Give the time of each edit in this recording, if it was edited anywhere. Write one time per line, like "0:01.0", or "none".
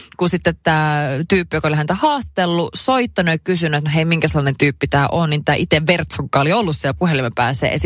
none

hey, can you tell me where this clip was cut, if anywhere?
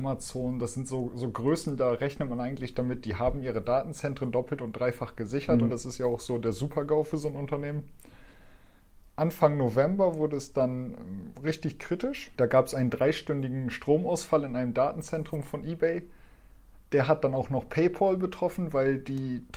0:05.7

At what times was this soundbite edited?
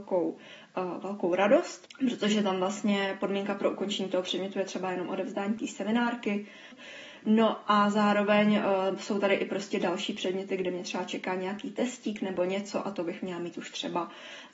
0:06.7

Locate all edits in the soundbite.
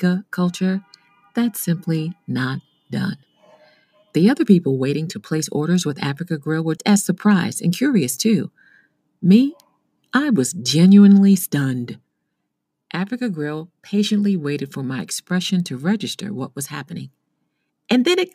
0:06.8

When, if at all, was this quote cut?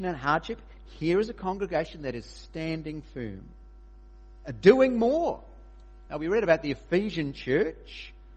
none

